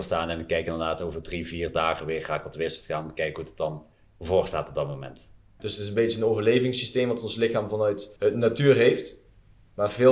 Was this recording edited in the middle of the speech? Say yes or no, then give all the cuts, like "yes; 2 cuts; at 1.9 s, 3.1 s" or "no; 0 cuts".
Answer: yes; 2 cuts; at 5.6 s, 8.2 s